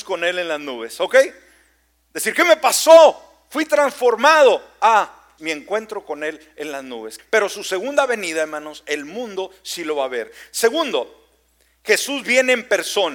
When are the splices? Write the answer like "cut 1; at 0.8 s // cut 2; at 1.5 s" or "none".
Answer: cut 1; at 5.4 s // cut 2; at 7.2 s

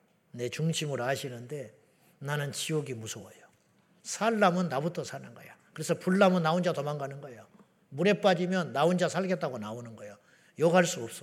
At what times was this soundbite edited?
cut 1; at 4.0 s

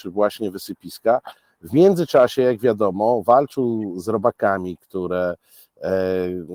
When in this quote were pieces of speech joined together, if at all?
none

